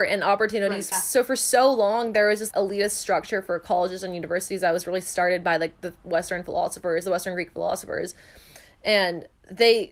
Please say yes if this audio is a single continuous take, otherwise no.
no